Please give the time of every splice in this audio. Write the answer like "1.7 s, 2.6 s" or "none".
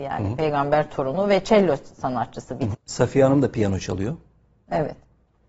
2.7 s